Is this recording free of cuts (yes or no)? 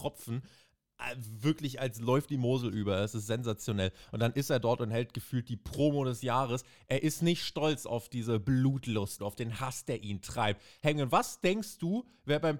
no